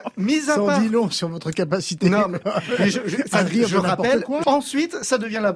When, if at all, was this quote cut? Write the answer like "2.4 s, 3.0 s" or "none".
4.4 s